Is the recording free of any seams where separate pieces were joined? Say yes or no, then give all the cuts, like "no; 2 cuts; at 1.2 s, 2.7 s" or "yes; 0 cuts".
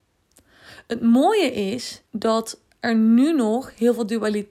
no; 1 cut; at 2.0 s